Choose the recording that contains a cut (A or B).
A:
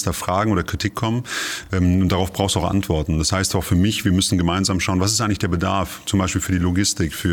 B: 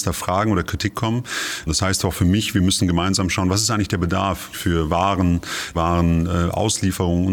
B